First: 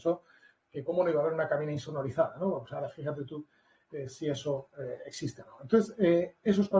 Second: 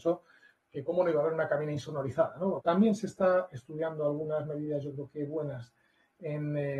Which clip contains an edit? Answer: second; 1 cut; at 2.6 s

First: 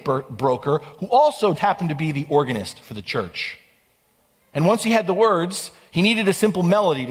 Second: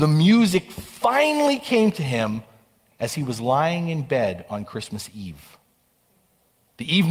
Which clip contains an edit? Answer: first; 2 cuts; at 1.5 s, 4.5 s

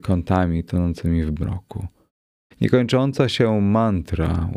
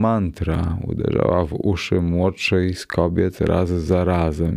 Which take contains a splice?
first; 1 cut; at 2.4 s

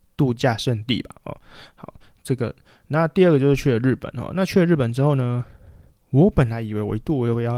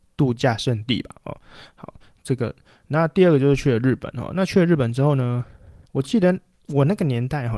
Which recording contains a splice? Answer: second; 1 cut; at 5.8 s

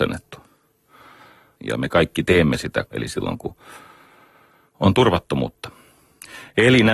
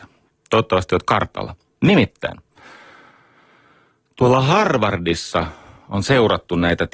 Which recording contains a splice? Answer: first; 2 cuts; at 1.5 s, 2.9 s

